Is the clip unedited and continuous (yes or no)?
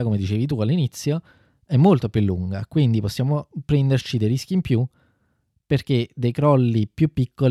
yes